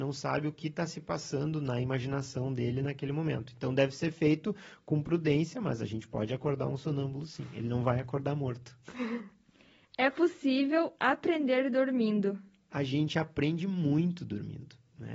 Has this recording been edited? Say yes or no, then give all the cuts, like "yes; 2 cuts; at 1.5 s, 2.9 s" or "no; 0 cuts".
no; 0 cuts